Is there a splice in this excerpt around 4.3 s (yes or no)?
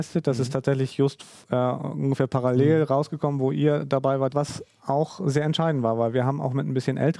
yes